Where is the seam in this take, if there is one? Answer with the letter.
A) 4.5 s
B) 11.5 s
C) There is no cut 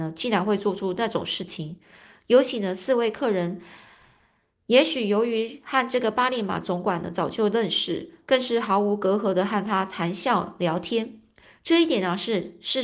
C